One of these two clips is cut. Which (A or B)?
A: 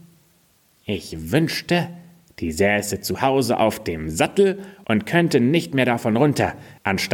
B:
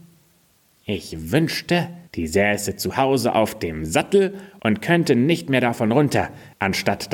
B